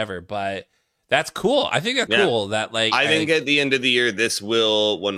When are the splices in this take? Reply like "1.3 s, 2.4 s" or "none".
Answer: 2.1 s

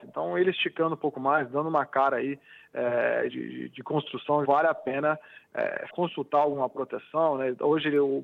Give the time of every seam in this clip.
3.3 s, 4.4 s, 5.9 s

